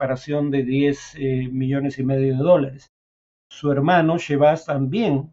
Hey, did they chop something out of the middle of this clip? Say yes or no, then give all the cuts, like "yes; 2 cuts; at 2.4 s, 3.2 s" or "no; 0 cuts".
no; 0 cuts